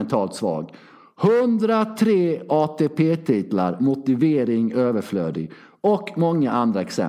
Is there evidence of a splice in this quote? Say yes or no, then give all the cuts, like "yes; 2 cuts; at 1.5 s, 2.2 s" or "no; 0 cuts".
no; 0 cuts